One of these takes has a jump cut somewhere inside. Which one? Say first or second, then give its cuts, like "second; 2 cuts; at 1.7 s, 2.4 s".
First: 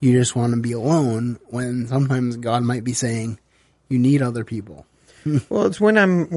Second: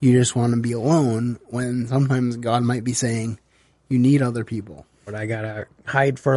second; 1 cut; at 5.1 s